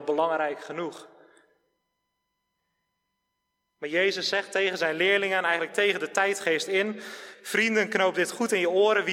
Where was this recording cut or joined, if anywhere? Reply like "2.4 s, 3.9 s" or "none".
none